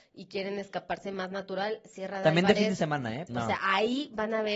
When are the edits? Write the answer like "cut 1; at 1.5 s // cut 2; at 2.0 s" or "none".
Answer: cut 1; at 3.3 s